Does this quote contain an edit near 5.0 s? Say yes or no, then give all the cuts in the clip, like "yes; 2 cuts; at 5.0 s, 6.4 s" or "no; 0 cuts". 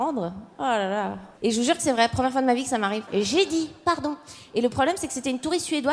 no; 2 cuts; at 1.4 s, 3.1 s